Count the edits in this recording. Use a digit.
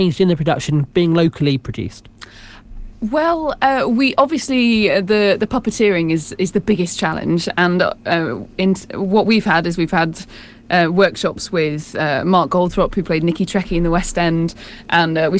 0